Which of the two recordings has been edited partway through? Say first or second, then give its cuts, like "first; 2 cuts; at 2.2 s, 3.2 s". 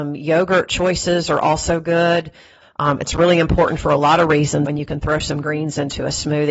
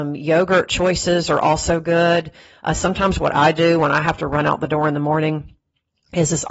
first; 2 cuts; at 2.6 s, 4.7 s